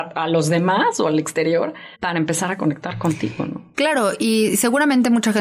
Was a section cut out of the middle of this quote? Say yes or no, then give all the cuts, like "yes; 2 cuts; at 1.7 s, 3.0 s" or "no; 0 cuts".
yes; 1 cut; at 1.9 s